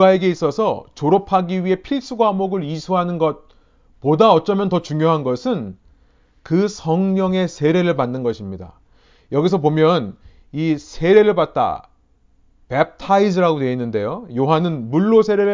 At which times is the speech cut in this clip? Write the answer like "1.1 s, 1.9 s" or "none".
14.3 s